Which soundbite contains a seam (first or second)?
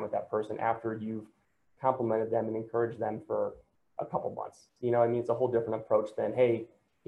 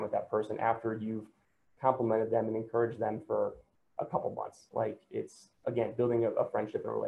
second